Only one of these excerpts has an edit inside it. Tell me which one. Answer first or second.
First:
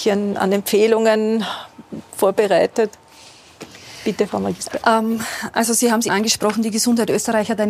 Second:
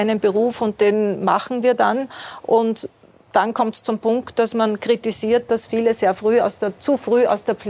first